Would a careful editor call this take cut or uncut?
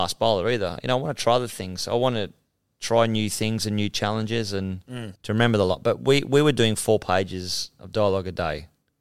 cut